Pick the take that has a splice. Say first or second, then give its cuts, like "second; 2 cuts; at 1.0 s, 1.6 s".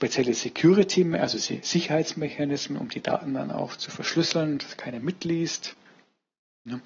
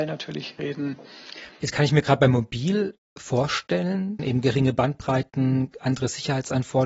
second; 2 cuts; at 1.5 s, 4.2 s